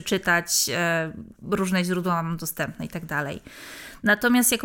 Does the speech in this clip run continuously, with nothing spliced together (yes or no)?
yes